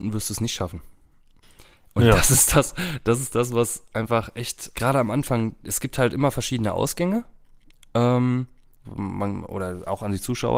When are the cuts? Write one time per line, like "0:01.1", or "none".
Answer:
0:04.7
0:08.8

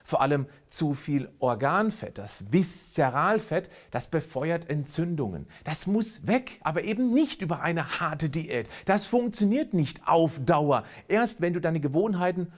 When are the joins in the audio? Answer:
none

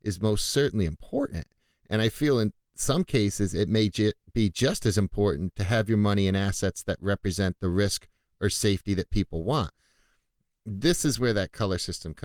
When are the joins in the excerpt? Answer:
none

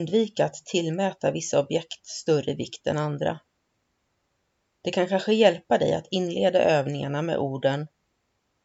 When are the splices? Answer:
none

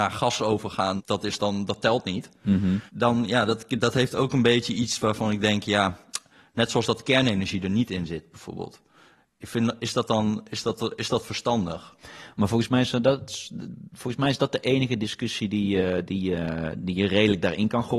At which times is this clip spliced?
0:01.0
0:02.9

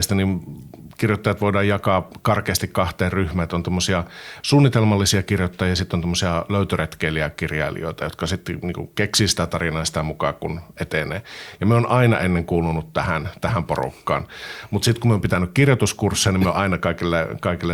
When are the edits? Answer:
none

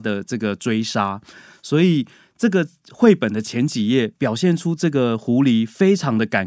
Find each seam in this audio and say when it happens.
none

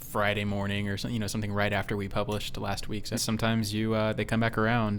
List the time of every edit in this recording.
0:03.2

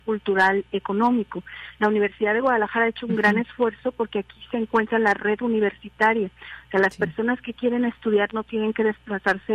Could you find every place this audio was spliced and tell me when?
none

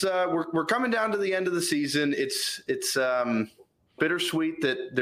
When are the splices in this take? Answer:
0:04.0

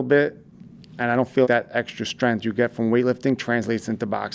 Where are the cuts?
0:01.4

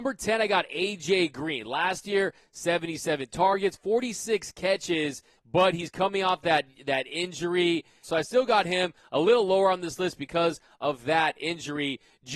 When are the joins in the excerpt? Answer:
0:05.4
0:08.0

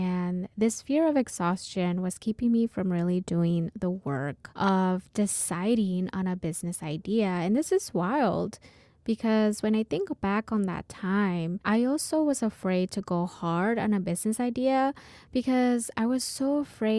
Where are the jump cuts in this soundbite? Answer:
none

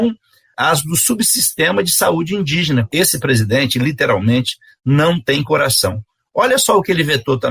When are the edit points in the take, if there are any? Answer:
0:02.9

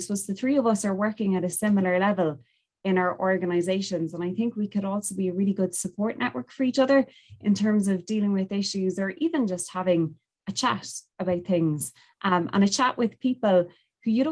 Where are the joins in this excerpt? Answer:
none

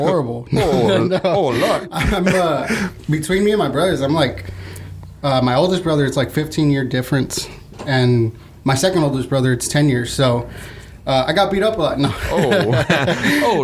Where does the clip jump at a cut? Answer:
none

